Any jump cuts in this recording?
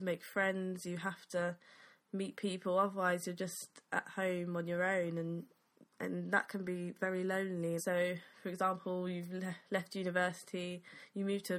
yes; 1 cut; at 7.8 s

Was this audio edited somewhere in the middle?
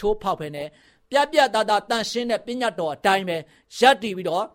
no; 0 cuts

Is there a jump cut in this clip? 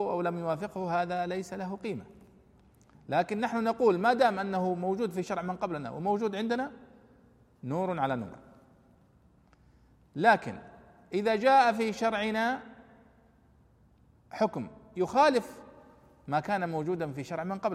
no; 0 cuts

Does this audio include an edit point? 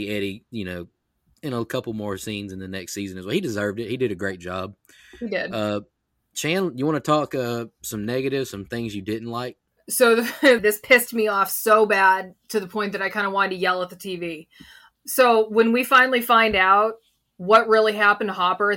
yes; 1 cut; at 10.6 s

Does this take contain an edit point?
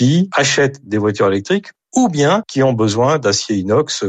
no; 0 cuts

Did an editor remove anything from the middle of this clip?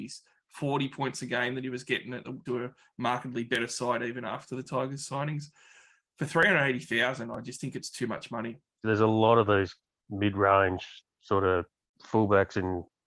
yes; 2 cuts; at 2.5 s, 8.8 s

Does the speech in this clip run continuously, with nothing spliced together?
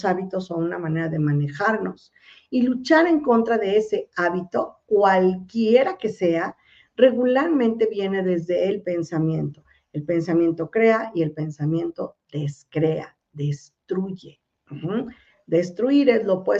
yes; 0 cuts

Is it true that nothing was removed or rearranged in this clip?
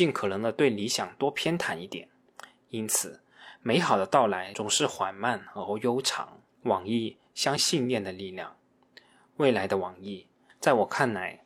no; 1 cut; at 7.6 s

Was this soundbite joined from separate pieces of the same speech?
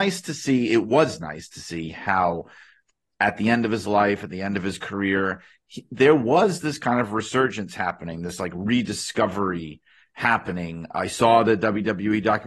no; 0 cuts

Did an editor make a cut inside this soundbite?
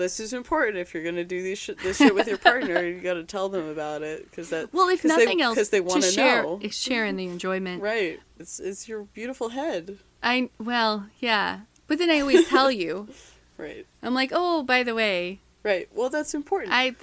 yes; 1 cut; at 8.4 s

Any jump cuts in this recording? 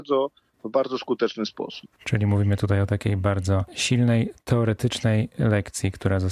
no; 0 cuts

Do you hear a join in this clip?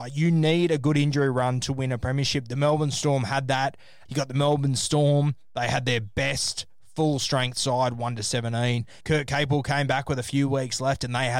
yes; 2 cuts; at 4.1 s, 9.0 s

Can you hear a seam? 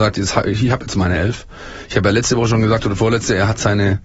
no; 0 cuts

